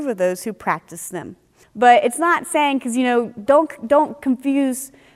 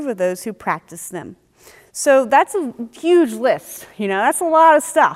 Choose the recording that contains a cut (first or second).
first